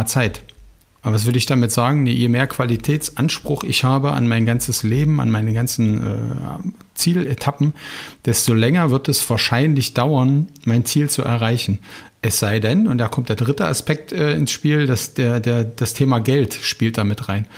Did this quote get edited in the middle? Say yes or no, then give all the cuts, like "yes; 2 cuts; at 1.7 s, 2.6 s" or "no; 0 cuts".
no; 0 cuts